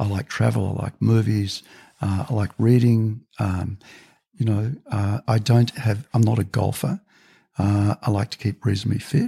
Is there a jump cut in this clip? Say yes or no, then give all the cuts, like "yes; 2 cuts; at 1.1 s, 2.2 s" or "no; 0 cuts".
yes; 1 cut; at 5.2 s